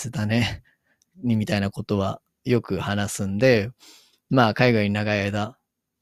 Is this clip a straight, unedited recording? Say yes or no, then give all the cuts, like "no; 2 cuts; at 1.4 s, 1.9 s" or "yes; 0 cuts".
yes; 0 cuts